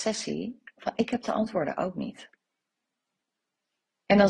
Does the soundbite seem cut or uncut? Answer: uncut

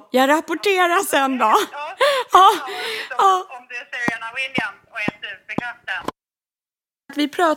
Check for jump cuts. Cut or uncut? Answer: uncut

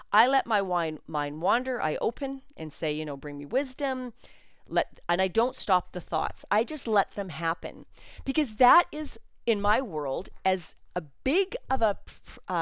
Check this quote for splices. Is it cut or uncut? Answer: uncut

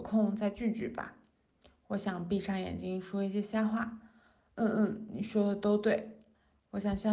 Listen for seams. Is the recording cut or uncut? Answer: uncut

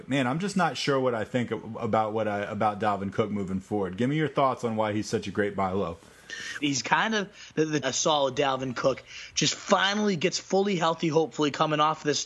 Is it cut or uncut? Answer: cut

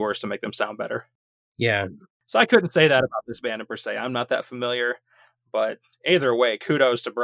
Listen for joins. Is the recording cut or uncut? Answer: uncut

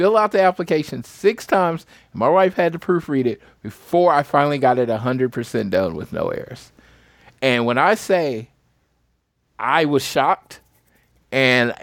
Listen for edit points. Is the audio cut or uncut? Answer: uncut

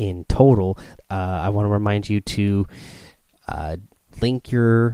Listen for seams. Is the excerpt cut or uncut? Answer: cut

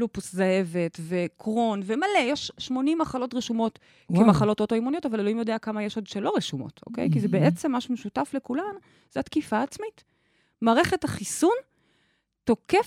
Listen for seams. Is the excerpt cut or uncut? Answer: uncut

